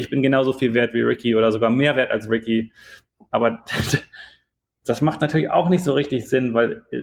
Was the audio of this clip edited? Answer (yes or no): no